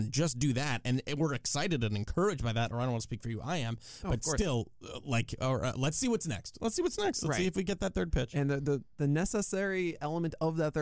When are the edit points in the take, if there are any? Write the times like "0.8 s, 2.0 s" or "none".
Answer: none